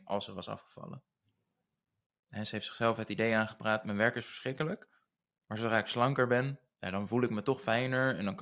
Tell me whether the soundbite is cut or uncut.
uncut